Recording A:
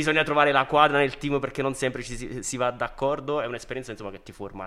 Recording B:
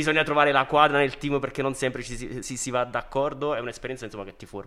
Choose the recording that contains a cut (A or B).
A